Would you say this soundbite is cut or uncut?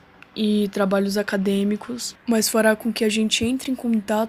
cut